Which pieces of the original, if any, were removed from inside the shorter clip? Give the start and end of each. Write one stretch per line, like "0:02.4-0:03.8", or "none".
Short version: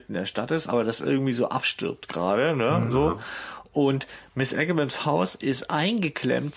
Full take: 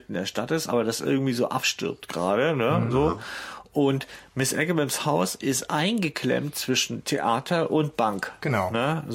none